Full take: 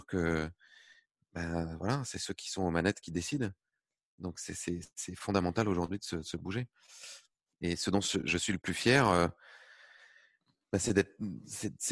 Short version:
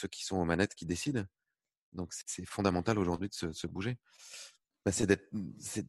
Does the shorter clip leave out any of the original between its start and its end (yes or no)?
yes